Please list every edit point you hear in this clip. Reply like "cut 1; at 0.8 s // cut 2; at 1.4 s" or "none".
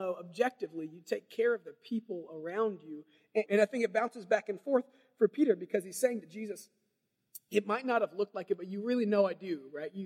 cut 1; at 3.5 s